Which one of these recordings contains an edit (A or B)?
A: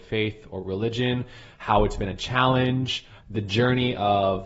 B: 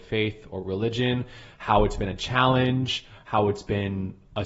A